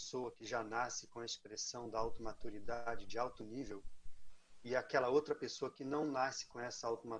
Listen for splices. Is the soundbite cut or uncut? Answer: uncut